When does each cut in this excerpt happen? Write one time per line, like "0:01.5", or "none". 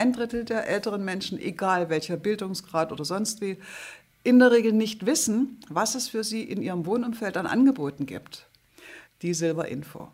0:09.1

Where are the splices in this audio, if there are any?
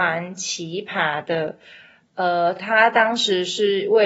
none

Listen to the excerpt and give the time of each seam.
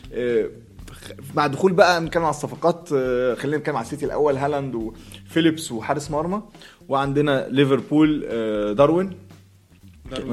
none

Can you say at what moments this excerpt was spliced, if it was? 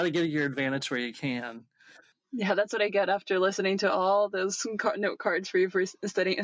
none

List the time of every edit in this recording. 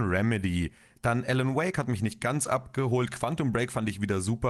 0:00.9

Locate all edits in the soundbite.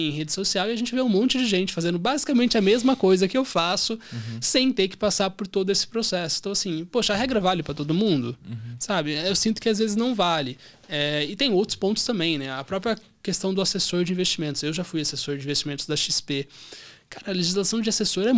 none

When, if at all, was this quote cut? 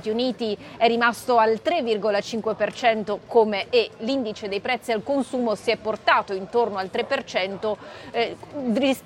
0:03.7

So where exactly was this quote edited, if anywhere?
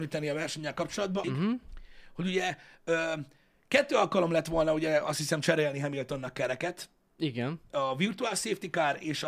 0:01.2

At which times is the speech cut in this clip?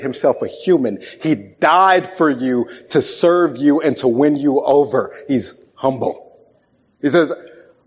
none

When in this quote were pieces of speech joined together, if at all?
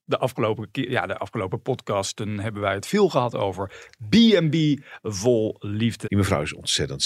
0:06.0

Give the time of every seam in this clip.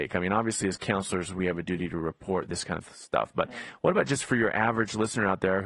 none

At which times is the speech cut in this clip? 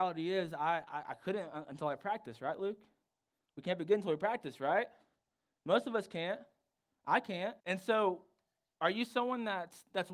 0:07.6

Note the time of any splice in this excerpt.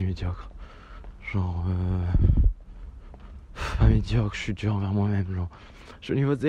none

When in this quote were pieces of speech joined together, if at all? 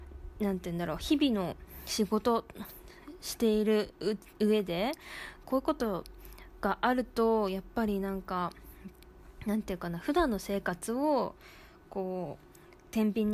0:05.4

